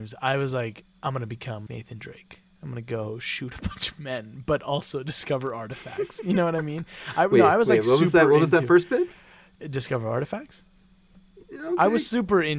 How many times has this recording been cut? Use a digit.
1